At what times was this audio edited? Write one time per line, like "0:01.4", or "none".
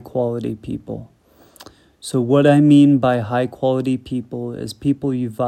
none